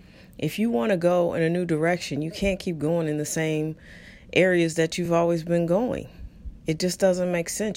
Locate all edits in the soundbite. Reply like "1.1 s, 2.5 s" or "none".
none

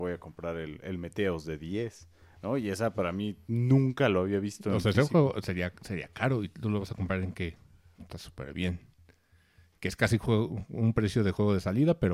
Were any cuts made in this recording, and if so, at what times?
8.0 s

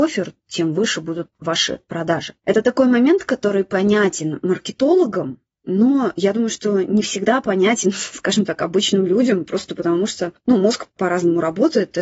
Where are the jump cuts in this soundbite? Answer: none

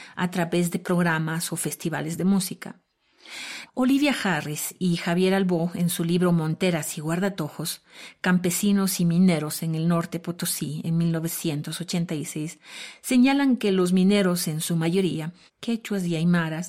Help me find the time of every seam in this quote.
3.7 s, 15.5 s

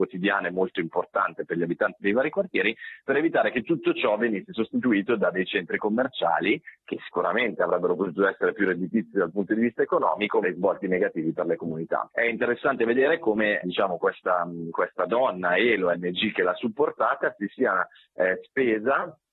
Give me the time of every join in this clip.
10.4 s, 12.1 s, 13.6 s

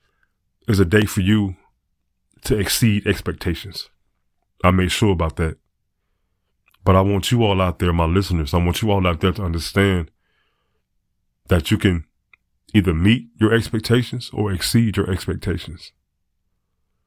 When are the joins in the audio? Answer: 4.5 s, 6.7 s

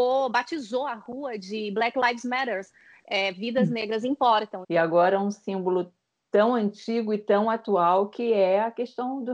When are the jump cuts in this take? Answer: 4.6 s

